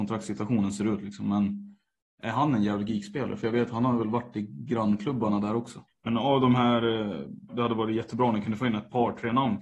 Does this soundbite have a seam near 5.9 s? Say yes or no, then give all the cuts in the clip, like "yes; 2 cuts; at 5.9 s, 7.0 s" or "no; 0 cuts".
yes; 2 cuts; at 5.9 s, 7.5 s